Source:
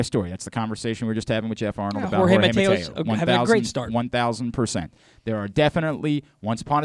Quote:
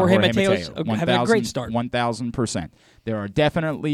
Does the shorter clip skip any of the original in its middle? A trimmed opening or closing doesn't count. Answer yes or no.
no